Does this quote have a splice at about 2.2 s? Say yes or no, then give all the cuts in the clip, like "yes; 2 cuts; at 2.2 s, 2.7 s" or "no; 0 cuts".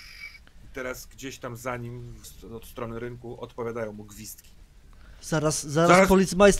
yes; 2 cuts; at 2.2 s, 5.2 s